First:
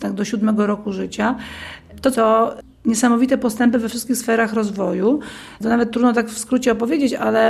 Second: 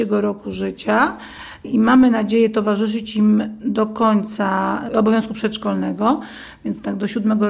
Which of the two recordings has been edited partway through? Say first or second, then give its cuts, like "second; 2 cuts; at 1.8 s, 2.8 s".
first; 1 cut; at 2.1 s